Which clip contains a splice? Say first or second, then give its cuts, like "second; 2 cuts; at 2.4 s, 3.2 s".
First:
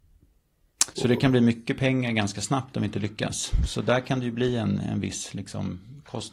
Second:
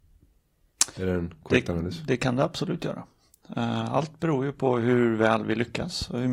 first; 1 cut; at 0.9 s